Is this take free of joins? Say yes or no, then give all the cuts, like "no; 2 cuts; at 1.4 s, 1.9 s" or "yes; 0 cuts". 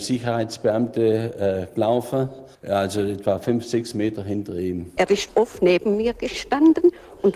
no; 2 cuts; at 2.5 s, 5.0 s